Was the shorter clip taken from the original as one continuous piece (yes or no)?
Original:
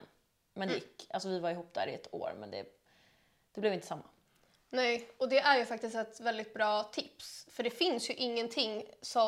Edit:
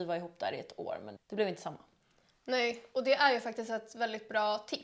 no